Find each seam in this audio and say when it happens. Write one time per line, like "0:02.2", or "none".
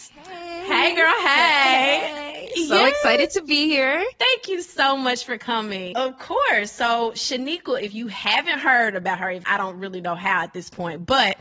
0:05.9